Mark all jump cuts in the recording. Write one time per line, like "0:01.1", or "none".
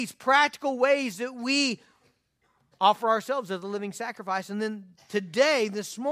none